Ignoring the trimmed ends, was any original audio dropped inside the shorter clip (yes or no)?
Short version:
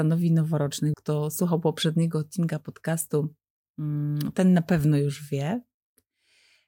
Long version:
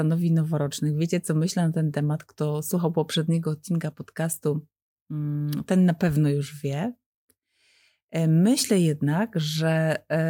yes